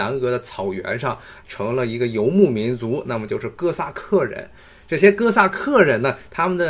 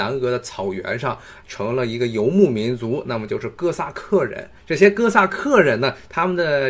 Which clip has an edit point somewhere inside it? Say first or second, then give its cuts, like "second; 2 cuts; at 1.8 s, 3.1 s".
second; 1 cut; at 4.6 s